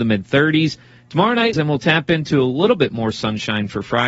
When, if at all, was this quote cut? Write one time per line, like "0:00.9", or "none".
0:01.5